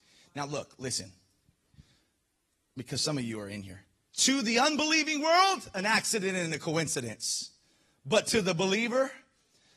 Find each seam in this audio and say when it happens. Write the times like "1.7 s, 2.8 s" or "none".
none